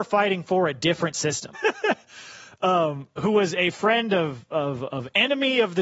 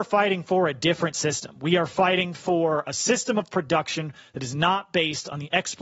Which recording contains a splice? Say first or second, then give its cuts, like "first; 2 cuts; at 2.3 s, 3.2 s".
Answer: first; 1 cut; at 1.5 s